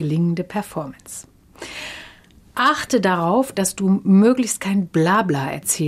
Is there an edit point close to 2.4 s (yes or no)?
no